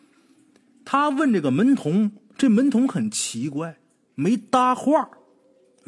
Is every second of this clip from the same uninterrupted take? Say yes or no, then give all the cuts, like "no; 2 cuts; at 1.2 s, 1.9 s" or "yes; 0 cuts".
yes; 0 cuts